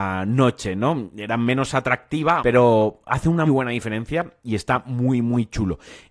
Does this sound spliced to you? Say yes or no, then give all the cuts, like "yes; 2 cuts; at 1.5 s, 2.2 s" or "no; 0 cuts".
yes; 2 cuts; at 2.4 s, 3.5 s